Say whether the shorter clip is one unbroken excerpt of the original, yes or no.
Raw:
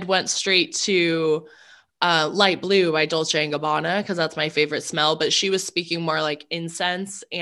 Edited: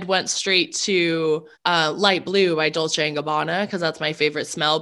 no